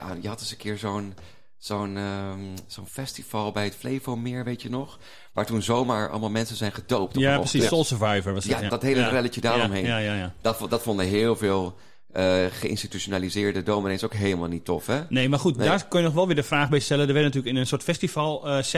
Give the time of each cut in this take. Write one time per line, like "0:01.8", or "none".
0:08.7